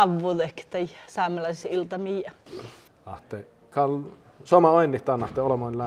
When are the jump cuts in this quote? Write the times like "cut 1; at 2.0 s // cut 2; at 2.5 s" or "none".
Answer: cut 1; at 2.9 s